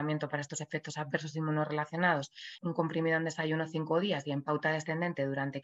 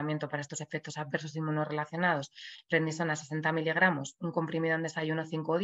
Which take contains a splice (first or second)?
first